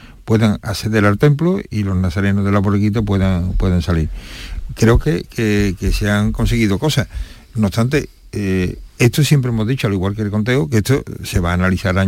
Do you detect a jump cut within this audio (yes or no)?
no